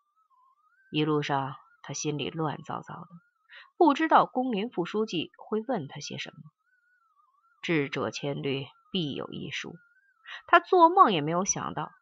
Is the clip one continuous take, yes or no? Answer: yes